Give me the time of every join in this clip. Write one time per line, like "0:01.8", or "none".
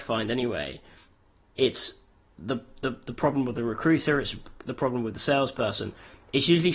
none